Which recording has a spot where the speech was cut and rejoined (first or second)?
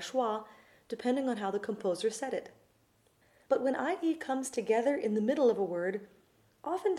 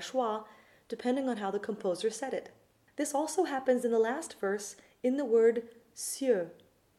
second